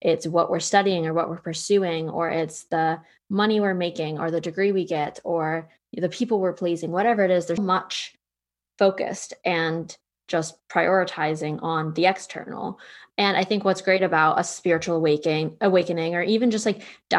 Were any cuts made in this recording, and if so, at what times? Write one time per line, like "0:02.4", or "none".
0:07.6